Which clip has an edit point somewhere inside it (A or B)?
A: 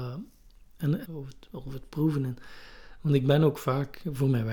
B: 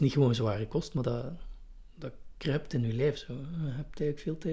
A